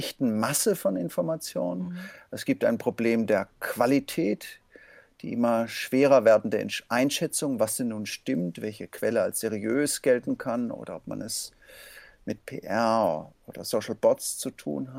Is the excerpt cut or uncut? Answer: uncut